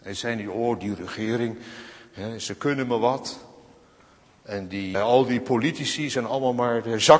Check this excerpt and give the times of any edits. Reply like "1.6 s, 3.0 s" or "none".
4.9 s